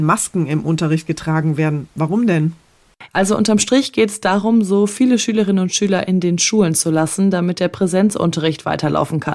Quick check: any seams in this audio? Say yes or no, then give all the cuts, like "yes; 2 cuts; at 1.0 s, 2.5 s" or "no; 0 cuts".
yes; 1 cut; at 3.1 s